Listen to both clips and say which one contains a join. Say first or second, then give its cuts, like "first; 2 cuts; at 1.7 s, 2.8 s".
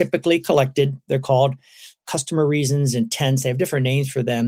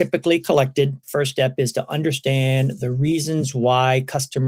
second; 1 cut; at 1.0 s